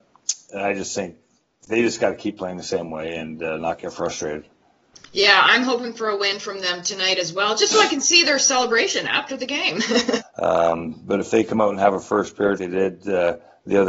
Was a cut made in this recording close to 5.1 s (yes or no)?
no